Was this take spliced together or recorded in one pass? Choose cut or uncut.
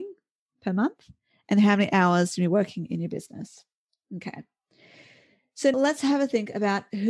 cut